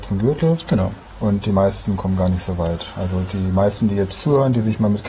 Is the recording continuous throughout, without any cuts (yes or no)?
yes